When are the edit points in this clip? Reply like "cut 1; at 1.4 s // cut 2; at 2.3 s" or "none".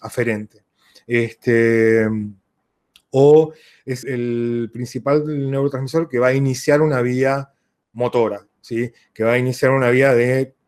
cut 1; at 4.0 s